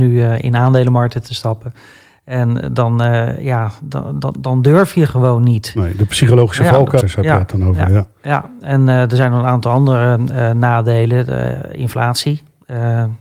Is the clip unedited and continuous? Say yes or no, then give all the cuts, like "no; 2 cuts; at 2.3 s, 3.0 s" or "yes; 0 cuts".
no; 1 cut; at 7.0 s